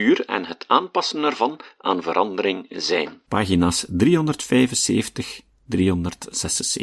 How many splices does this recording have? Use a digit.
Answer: 1